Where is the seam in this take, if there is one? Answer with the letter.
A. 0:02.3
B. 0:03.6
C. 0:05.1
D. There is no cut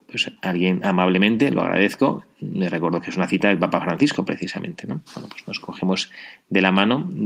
C